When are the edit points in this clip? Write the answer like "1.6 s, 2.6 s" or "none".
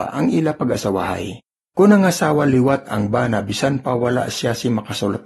1.7 s